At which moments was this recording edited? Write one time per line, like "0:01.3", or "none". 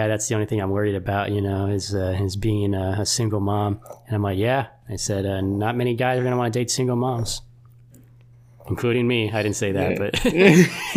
none